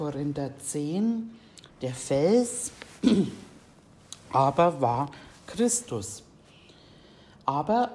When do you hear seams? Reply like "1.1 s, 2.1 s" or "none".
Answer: 1.7 s